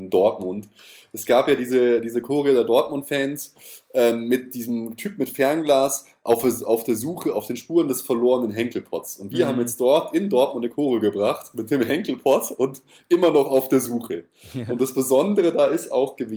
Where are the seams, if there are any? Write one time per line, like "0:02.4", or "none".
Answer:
none